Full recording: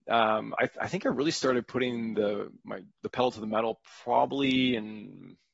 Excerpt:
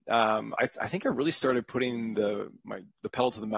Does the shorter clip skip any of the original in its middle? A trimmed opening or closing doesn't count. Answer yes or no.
no